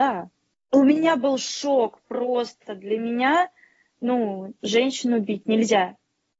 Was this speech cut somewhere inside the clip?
no; 0 cuts

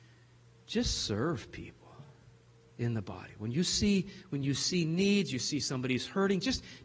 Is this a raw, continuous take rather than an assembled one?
yes; 0 cuts

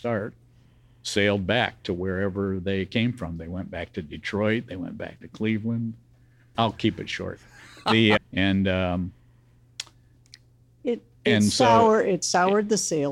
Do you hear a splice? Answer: yes; 2 cuts; at 6.5 s, 8.2 s

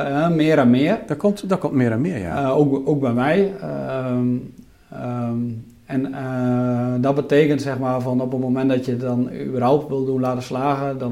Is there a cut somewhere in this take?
no; 0 cuts

